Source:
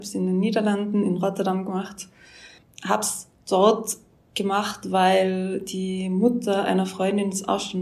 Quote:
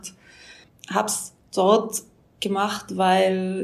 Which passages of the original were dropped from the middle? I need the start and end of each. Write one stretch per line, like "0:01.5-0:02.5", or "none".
none